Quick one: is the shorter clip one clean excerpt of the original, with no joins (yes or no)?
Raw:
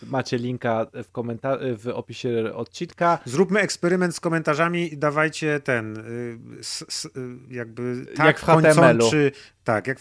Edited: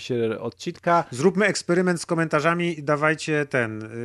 yes